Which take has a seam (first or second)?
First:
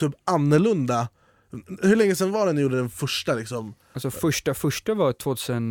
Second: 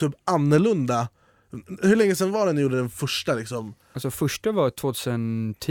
second